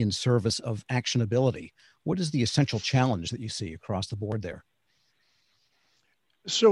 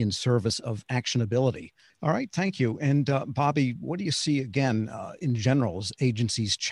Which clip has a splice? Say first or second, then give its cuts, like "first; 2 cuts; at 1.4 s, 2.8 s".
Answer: second; 1 cut; at 1.9 s